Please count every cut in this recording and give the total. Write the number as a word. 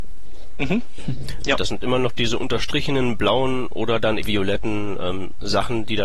two